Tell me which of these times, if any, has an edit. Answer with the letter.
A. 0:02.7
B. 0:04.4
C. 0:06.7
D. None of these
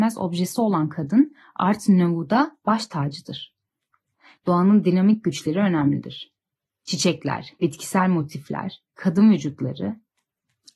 B